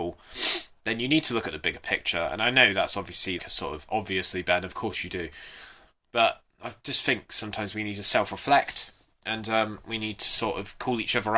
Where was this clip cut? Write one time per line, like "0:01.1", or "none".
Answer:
0:03.4